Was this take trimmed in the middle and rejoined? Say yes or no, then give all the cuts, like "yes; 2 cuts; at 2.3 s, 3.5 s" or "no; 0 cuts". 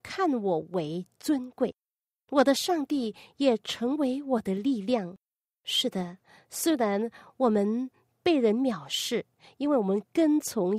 no; 0 cuts